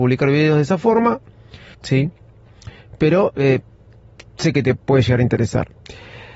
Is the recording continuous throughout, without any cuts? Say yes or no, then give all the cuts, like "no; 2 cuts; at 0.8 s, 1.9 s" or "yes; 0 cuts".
no; 1 cut; at 1.7 s